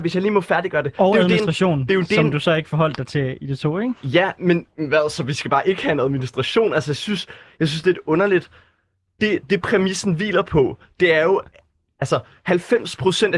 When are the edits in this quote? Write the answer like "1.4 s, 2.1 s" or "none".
none

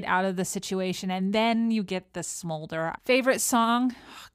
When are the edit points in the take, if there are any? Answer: 3.0 s

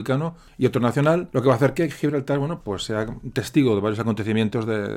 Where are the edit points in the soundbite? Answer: 2.6 s

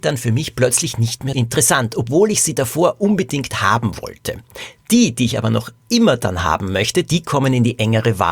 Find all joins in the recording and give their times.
1.3 s

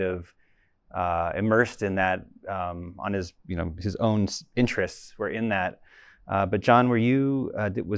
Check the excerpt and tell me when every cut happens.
none

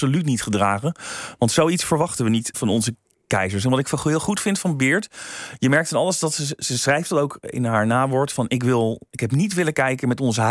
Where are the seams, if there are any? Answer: 2.5 s

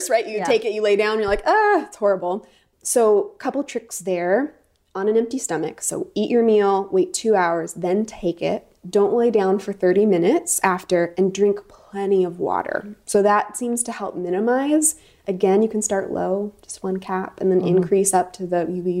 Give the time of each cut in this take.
none

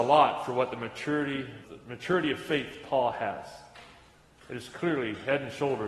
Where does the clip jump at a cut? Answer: 1.6 s

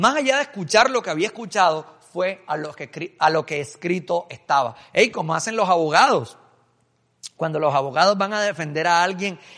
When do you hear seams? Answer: none

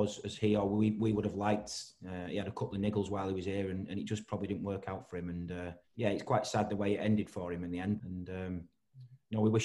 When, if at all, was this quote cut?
5.8 s, 8.0 s

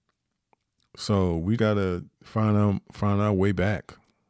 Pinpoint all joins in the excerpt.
1.6 s

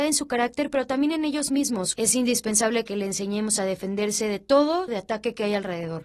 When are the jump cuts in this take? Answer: 1.9 s, 4.9 s

